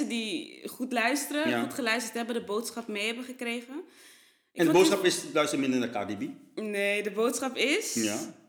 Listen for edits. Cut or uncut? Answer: uncut